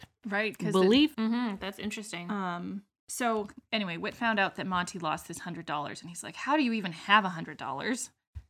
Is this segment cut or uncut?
cut